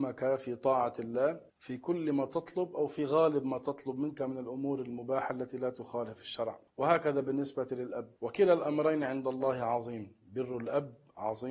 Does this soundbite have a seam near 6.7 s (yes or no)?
yes